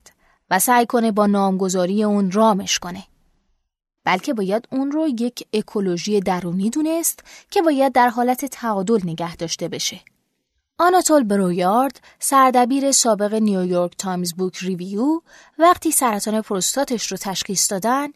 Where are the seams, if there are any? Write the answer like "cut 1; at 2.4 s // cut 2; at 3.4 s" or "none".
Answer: cut 1; at 4.0 s